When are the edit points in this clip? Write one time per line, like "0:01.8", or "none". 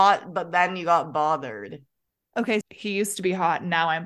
0:02.6